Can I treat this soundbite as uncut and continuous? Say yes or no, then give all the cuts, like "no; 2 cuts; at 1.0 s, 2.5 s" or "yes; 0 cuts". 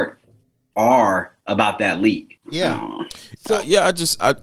no; 1 cut; at 2.4 s